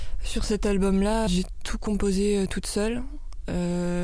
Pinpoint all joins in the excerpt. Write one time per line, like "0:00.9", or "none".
0:01.3